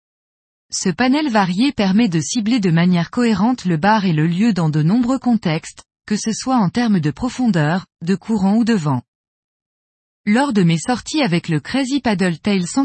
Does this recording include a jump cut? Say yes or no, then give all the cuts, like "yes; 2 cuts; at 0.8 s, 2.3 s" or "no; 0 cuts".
no; 0 cuts